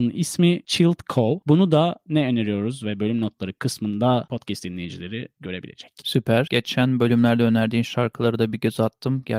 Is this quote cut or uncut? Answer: cut